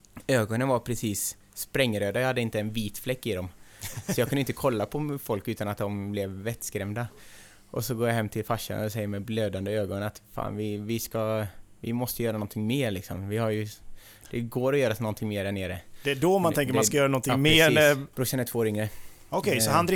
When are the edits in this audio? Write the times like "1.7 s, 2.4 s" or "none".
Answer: 18.1 s